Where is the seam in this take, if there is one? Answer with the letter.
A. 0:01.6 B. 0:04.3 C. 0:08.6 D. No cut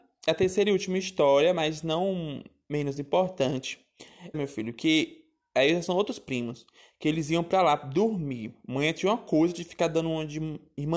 B